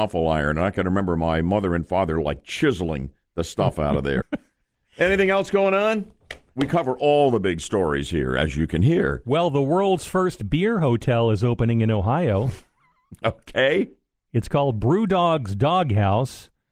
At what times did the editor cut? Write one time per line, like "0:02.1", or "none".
0:04.2